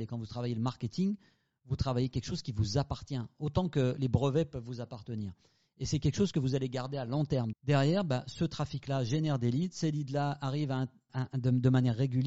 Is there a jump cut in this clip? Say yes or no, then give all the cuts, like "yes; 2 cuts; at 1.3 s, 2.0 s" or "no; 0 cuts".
yes; 2 cuts; at 7.5 s, 11.1 s